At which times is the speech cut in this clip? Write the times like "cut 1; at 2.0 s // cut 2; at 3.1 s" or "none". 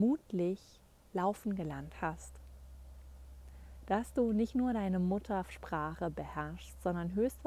cut 1; at 3.8 s